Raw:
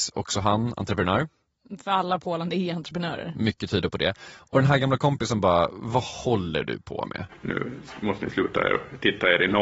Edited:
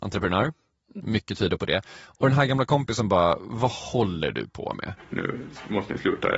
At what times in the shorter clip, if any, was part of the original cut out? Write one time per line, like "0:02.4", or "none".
0:01.0